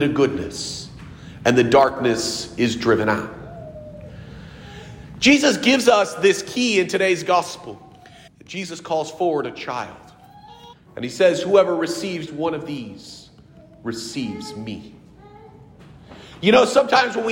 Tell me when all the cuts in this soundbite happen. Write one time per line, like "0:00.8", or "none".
0:08.3
0:10.7
0:12.3